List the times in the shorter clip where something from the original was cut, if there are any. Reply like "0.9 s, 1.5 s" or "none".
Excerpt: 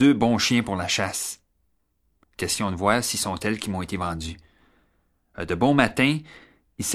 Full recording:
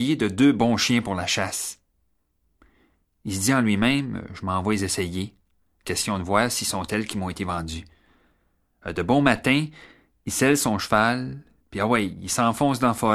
2.2 s